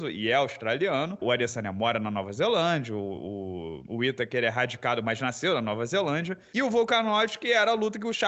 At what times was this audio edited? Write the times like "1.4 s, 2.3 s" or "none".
1.2 s